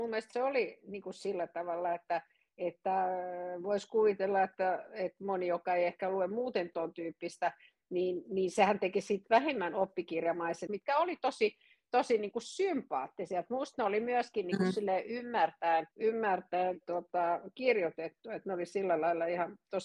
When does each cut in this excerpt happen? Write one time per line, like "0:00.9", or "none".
0:10.7
0:15.9